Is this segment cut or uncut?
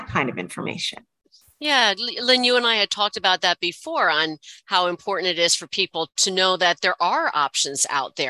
uncut